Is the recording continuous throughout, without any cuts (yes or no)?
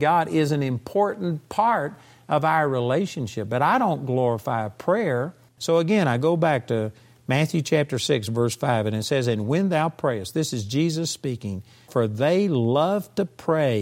no